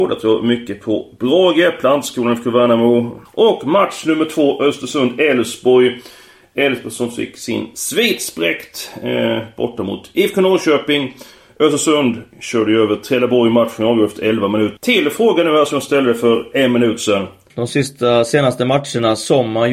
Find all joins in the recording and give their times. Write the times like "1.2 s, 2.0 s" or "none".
3.3 s, 14.8 s, 17.5 s